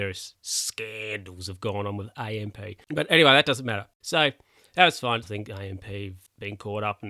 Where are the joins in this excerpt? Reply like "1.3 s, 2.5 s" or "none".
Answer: 4.0 s, 5.2 s